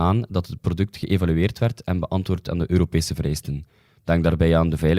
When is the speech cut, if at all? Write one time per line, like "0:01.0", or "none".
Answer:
none